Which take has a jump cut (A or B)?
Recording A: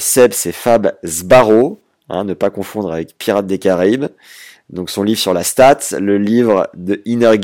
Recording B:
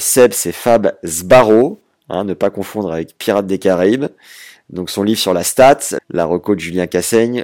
B